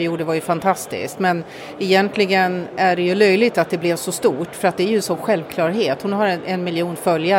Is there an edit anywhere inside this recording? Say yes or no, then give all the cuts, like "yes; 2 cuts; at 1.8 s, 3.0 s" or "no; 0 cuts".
no; 0 cuts